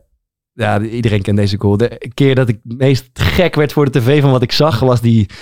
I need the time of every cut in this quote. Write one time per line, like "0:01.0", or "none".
none